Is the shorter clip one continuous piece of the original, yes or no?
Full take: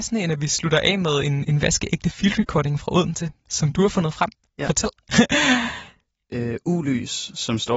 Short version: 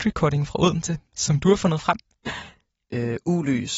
no